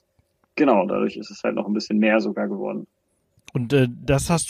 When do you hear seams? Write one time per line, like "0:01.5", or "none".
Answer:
none